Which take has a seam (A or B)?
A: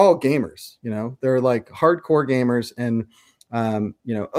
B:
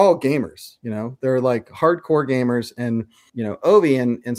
B